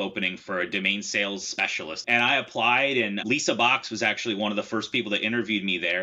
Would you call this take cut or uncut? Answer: cut